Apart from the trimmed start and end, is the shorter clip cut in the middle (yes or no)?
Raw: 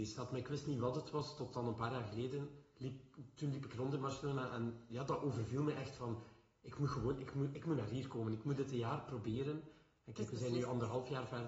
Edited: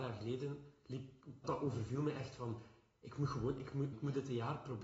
yes